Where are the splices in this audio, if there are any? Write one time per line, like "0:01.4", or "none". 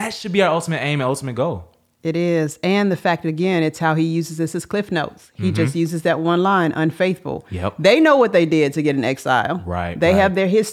none